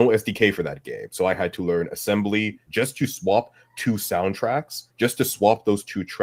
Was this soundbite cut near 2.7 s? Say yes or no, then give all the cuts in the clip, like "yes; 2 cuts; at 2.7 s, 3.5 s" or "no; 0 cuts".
yes; 2 cuts; at 2.7 s, 4.9 s